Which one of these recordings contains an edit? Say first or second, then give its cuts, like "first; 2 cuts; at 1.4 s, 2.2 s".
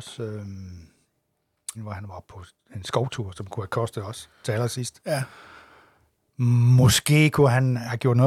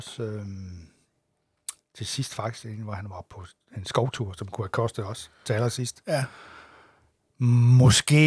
first; 1 cut; at 1.7 s